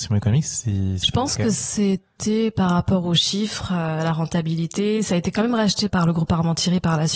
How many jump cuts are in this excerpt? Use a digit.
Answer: 1